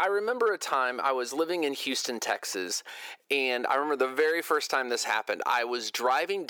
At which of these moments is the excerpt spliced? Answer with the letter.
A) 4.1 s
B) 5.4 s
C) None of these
C